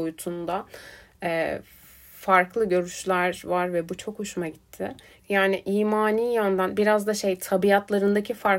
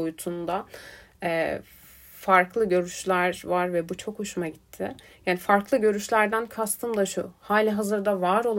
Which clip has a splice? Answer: first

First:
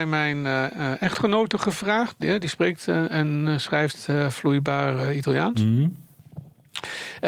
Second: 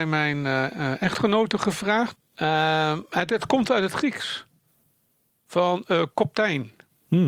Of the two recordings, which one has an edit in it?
second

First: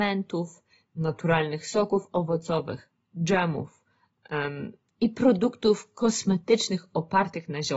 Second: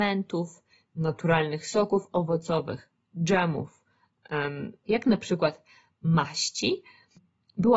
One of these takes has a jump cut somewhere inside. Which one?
second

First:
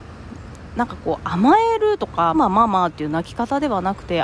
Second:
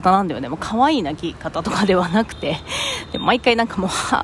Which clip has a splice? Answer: first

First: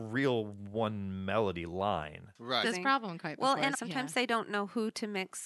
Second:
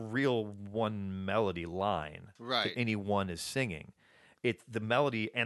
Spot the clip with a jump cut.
first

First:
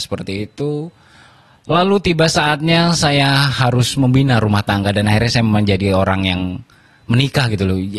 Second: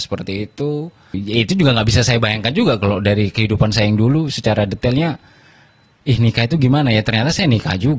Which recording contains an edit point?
second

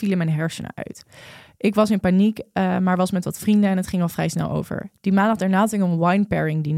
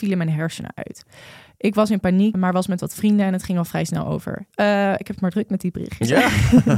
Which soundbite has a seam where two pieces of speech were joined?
second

